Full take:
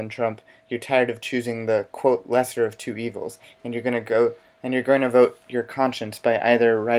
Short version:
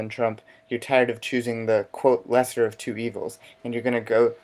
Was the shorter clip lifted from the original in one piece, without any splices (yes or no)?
yes